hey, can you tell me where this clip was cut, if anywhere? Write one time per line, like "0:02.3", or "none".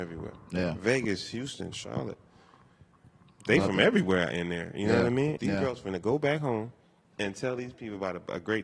0:01.7
0:05.4